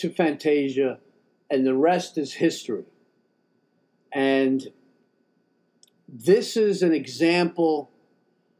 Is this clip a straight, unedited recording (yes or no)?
yes